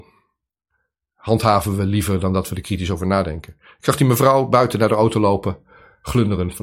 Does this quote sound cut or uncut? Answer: uncut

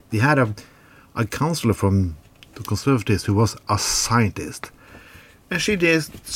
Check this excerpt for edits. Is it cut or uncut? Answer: uncut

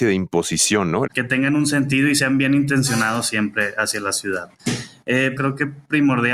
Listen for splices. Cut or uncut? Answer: cut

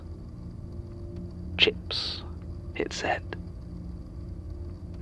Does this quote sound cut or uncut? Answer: uncut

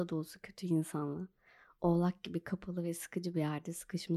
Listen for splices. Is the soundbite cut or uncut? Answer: uncut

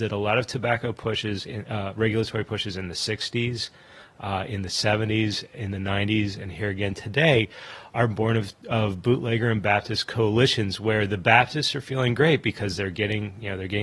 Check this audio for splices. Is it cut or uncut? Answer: uncut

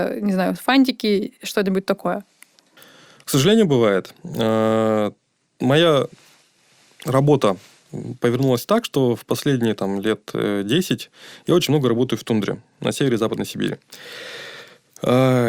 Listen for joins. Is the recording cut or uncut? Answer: uncut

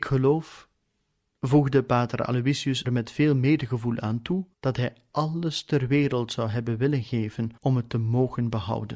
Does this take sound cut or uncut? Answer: cut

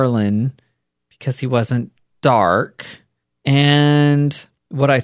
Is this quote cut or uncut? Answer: uncut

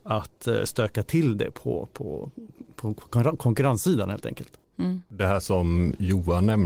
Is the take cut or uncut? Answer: uncut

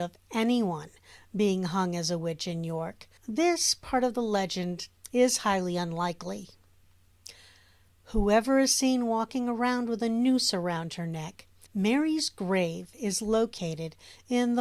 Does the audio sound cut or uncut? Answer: cut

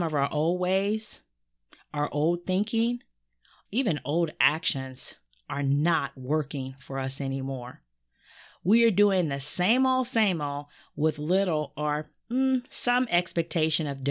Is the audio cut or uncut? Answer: cut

